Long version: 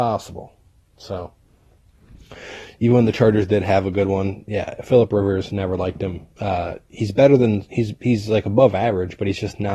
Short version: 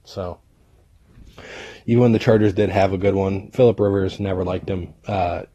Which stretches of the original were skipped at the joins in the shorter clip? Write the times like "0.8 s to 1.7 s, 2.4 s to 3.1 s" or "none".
4.5 s to 4.8 s